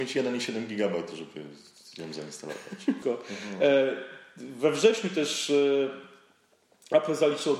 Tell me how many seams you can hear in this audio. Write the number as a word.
one